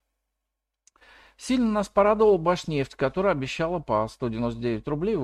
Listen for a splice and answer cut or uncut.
uncut